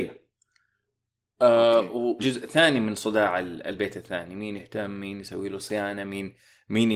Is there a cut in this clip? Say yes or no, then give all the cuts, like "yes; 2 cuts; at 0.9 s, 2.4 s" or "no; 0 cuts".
yes; 1 cut; at 2.2 s